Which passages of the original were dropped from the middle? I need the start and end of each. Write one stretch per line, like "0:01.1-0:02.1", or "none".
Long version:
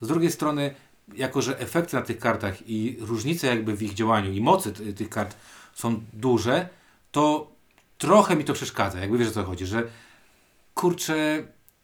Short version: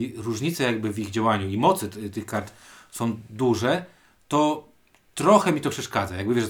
none